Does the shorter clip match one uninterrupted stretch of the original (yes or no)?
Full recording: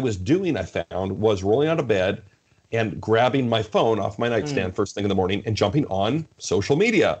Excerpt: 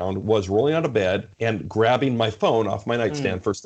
no